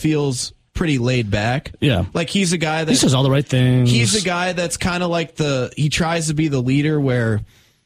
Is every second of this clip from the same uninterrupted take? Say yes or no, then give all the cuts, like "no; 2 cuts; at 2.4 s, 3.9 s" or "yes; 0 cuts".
yes; 0 cuts